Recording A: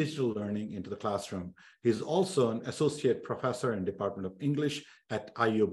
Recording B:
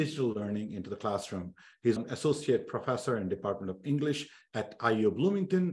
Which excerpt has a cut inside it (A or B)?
B